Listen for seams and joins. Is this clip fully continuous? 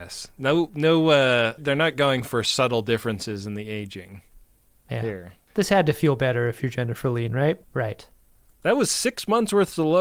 no; 2 cuts; at 1.6 s, 7.6 s

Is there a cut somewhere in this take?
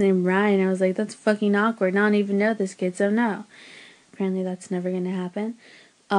yes; 1 cut; at 4.1 s

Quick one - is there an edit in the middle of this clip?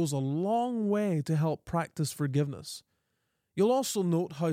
no; 0 cuts

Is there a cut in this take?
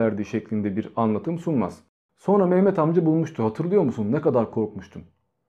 yes; 1 cut; at 2.1 s

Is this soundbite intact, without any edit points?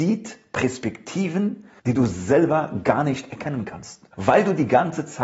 no; 2 cuts; at 1.8 s, 4.1 s

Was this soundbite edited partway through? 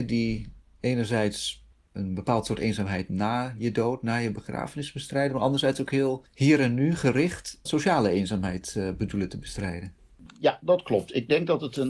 yes; 1 cut; at 7.7 s

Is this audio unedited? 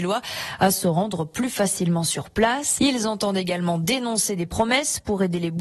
no; 1 cut; at 2.8 s

